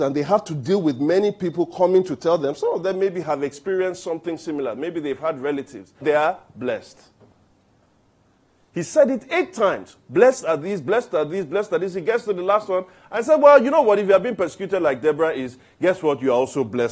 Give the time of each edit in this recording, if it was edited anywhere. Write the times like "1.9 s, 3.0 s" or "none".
6.0 s